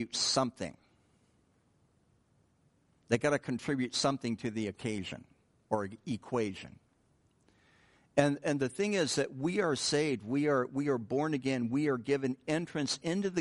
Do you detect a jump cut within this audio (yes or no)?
no